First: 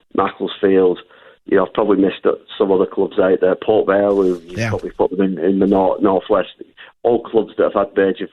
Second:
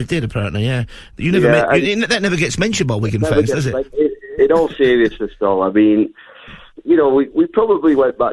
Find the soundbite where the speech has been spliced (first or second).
second